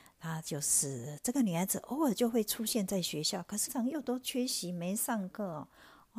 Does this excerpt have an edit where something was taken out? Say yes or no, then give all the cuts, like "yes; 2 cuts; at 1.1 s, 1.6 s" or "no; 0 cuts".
yes; 1 cut; at 3.7 s